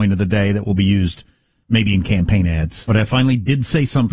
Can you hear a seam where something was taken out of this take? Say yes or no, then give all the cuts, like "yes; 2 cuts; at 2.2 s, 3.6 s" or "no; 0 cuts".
yes; 1 cut; at 2.9 s